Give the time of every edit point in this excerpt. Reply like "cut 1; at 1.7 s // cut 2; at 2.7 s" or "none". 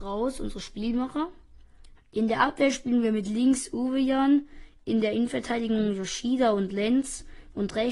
cut 1; at 2.0 s